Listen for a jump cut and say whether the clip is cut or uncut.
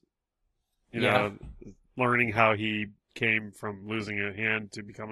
uncut